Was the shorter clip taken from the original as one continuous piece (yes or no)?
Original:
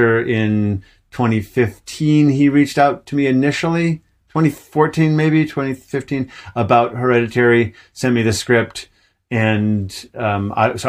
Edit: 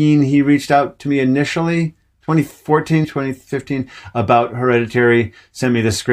no